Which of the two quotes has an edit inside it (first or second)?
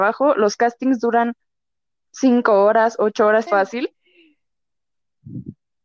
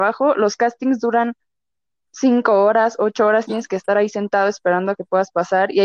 first